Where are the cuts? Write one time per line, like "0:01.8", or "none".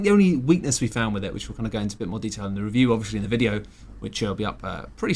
none